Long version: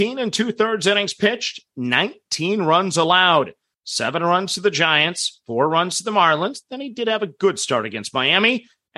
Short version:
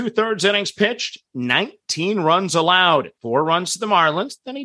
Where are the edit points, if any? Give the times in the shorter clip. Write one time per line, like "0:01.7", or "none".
0:03.2